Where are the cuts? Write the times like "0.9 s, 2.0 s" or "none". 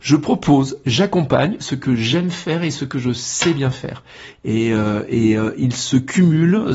4.3 s